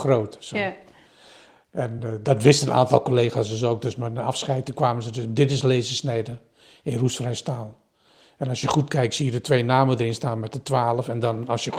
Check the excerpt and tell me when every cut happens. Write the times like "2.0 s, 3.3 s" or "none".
none